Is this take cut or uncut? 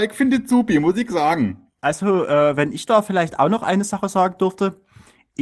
uncut